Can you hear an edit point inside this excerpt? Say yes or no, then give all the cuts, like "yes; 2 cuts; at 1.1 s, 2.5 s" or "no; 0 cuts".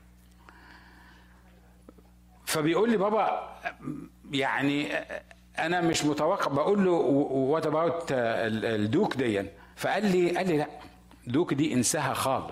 yes; 1 cut; at 9.7 s